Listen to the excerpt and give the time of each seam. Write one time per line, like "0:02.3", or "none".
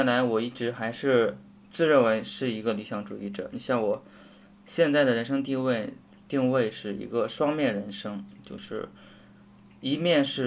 none